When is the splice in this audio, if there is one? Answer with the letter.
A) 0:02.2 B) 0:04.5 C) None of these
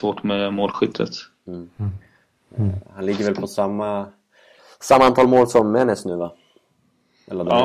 C